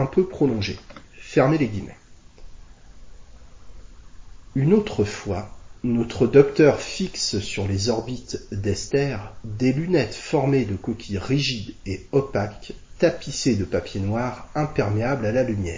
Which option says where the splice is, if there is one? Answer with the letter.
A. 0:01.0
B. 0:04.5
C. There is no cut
C